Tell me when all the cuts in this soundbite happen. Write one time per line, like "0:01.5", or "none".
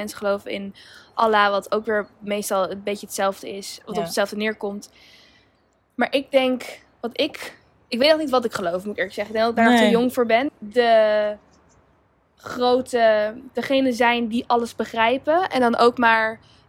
0:10.5